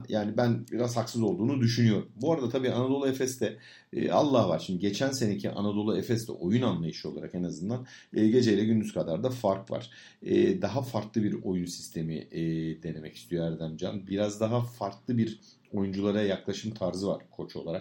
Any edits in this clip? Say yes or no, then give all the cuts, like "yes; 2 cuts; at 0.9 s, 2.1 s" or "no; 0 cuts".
no; 0 cuts